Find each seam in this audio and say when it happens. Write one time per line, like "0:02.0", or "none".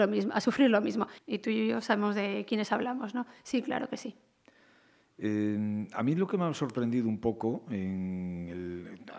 0:01.2